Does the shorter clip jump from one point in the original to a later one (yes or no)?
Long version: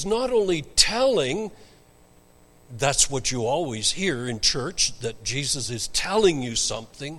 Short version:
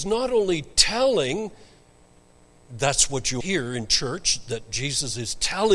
yes